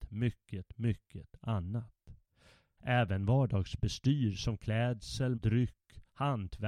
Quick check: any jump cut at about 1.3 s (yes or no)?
no